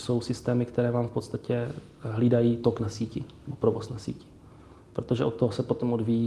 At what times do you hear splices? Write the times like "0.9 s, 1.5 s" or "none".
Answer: none